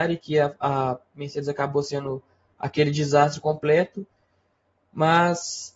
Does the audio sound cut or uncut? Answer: uncut